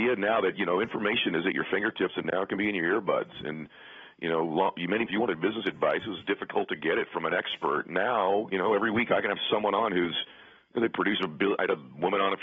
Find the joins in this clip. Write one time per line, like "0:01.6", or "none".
0:05.1